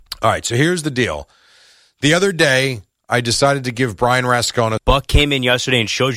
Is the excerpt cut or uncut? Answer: cut